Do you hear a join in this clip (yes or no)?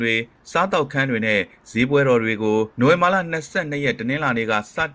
yes